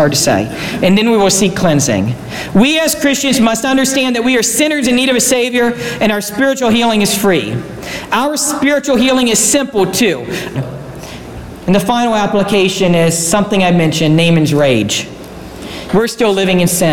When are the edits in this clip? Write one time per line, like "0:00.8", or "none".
0:10.5
0:15.9

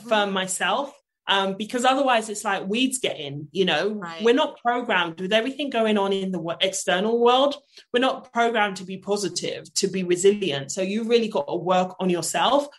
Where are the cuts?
none

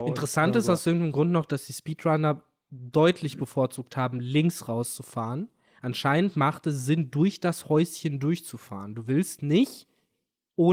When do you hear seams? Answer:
none

